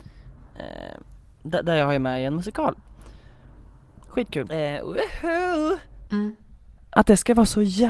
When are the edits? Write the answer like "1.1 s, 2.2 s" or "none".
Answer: 4.5 s, 6.1 s